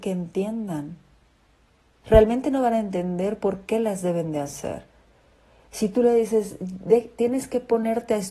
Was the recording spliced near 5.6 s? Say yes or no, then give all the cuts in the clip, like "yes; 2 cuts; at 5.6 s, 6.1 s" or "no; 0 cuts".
no; 1 cut; at 2.0 s